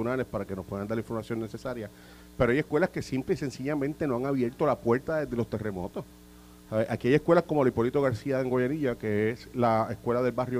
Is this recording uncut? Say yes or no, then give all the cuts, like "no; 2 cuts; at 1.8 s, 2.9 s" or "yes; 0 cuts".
yes; 0 cuts